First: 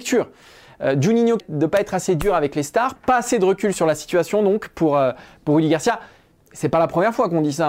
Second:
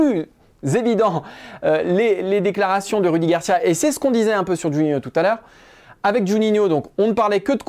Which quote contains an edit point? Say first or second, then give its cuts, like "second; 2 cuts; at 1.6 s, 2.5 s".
first; 2 cuts; at 1.4 s, 3.0 s